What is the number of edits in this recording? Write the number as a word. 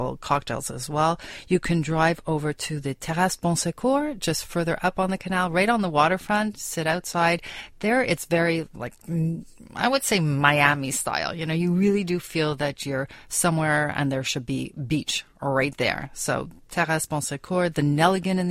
zero